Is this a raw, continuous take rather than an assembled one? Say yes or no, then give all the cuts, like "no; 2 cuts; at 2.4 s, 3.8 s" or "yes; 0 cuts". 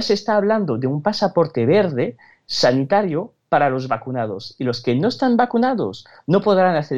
yes; 0 cuts